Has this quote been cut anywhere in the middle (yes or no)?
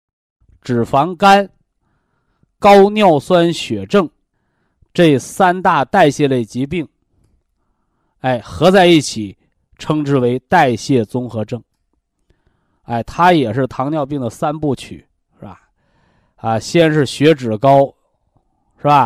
no